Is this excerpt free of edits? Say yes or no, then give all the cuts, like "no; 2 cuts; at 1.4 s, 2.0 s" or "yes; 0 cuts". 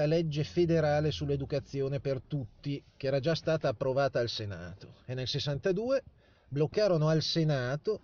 yes; 0 cuts